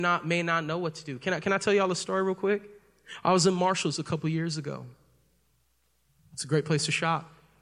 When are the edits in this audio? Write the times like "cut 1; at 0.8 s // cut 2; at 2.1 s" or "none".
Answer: none